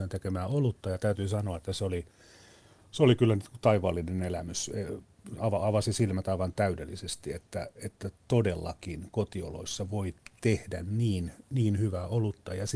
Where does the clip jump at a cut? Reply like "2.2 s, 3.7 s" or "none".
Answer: none